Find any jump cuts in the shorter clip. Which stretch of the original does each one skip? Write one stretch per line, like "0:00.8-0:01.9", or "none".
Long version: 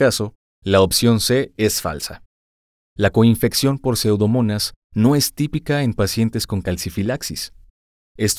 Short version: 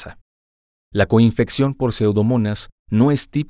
none